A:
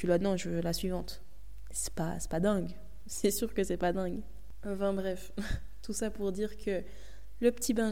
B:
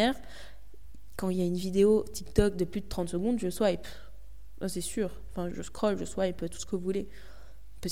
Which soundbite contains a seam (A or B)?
B